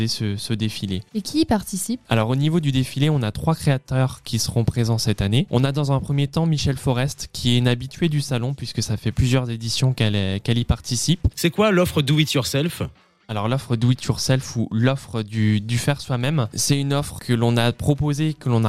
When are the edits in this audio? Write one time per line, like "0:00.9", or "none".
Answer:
0:11.3